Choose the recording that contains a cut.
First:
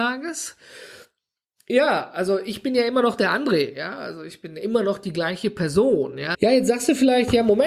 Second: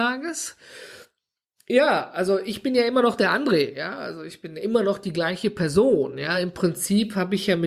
first; 1 cut; at 6.3 s

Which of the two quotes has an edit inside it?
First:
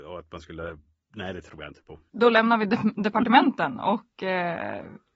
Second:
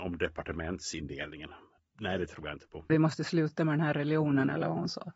second; 2 cuts; at 1.8 s, 2.9 s

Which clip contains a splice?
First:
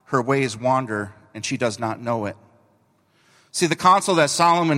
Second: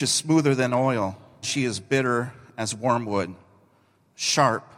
second; 1 cut; at 1.4 s

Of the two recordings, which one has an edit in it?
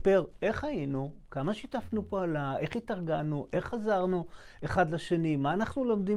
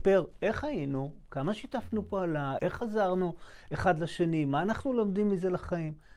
second; 1 cut; at 2.6 s

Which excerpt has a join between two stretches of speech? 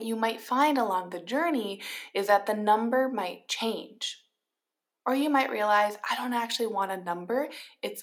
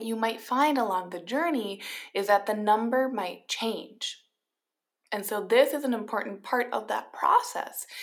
second; 1 cut; at 4.9 s

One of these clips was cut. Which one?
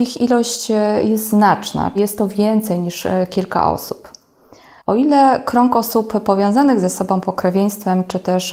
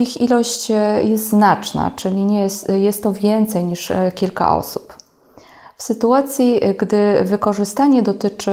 first; 2 cuts; at 1.9 s, 4.8 s

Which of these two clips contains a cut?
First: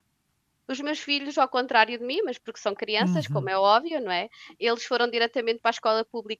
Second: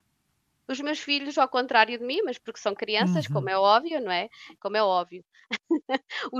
second; 1 cut; at 4.6 s

